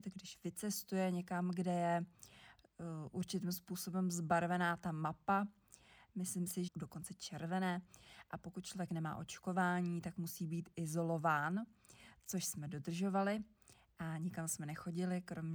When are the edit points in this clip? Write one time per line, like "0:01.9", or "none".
0:06.7